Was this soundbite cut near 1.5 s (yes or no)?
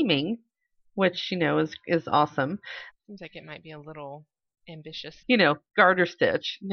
no